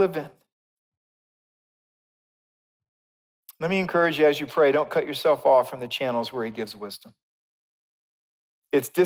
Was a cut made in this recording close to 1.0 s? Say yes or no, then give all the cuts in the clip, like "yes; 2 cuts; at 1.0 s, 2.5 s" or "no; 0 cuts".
no; 0 cuts